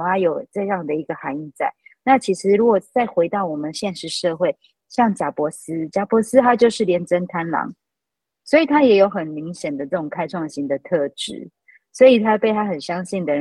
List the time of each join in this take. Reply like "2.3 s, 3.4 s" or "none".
none

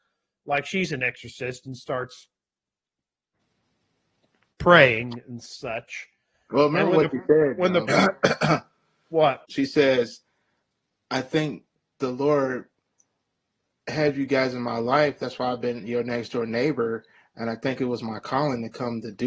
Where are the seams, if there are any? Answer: 7.9 s, 9.4 s

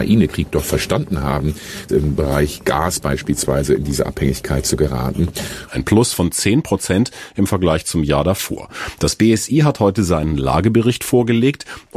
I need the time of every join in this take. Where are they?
1.9 s, 5.7 s

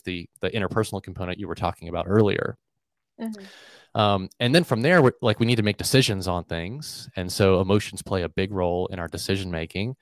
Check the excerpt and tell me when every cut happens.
none

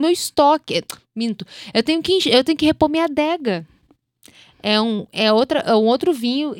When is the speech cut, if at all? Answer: none

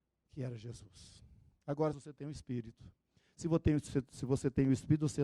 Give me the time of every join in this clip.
1.9 s

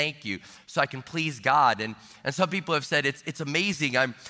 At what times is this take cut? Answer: none

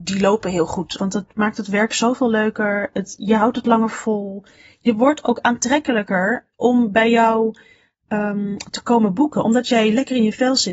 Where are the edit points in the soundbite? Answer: 1.0 s

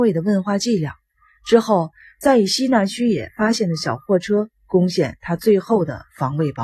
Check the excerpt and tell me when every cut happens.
none

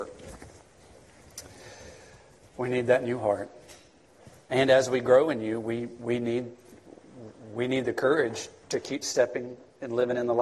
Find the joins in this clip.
none

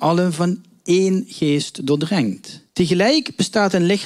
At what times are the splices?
2.7 s

